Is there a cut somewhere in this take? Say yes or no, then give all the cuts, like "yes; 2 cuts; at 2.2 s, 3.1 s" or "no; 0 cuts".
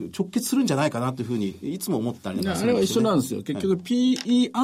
no; 0 cuts